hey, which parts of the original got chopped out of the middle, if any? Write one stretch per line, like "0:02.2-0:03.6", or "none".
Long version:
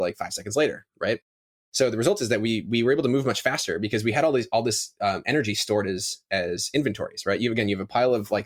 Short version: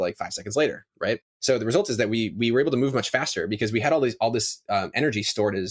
0:01.3-0:01.6